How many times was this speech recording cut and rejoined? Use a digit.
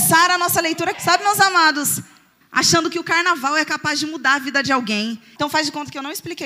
3